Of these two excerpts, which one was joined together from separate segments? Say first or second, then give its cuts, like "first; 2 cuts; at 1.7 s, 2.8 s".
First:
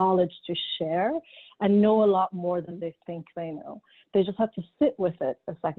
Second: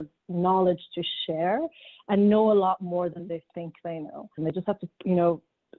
second; 1 cut; at 4.4 s